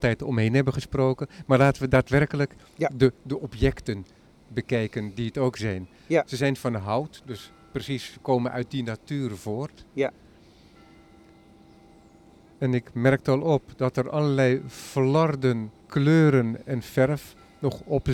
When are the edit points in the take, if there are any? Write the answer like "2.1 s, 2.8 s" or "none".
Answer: 15.8 s